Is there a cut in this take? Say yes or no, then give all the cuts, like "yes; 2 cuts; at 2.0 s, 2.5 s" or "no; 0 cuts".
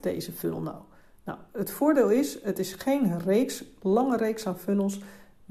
no; 0 cuts